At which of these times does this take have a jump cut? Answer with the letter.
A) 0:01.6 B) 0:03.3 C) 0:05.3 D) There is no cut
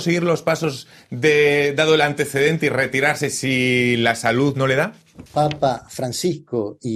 C